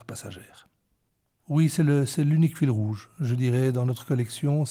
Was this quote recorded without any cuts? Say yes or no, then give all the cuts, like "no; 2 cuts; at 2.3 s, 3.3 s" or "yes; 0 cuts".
no; 1 cut; at 1.4 s